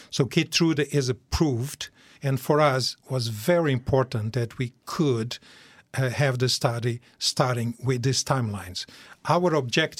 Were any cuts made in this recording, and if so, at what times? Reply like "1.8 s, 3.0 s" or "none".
2.1 s